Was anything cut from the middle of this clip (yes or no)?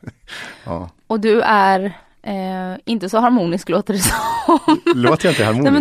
no